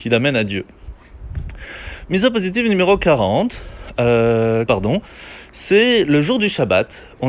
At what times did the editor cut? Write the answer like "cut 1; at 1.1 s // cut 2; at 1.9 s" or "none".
cut 1; at 4.7 s

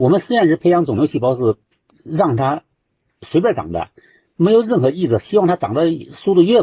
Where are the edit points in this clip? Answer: none

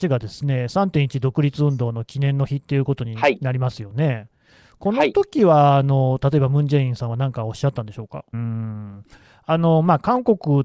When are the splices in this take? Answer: cut 1; at 8.3 s

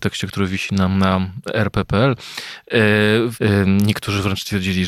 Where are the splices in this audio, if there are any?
cut 1; at 3.3 s

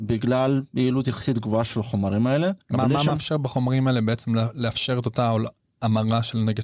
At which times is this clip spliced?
none

